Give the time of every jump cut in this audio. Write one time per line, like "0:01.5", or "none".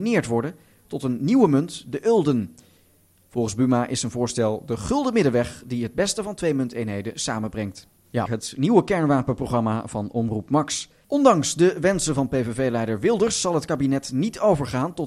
0:08.3
0:11.0